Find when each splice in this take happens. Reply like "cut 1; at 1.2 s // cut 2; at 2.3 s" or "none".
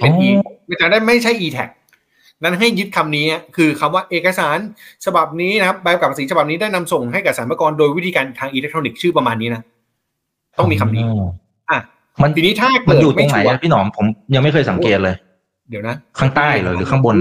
none